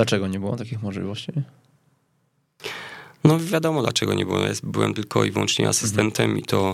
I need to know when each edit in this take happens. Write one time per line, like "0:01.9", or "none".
none